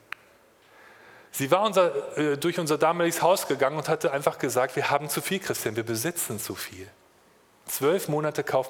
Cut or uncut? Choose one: uncut